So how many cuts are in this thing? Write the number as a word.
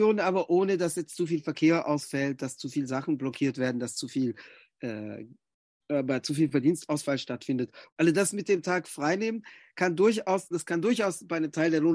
two